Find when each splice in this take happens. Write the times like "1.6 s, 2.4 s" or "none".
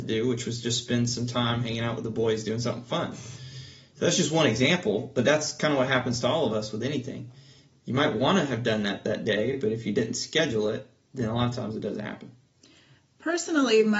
none